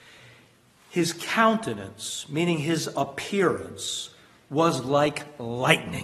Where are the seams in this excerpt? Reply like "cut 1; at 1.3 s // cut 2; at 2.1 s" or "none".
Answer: none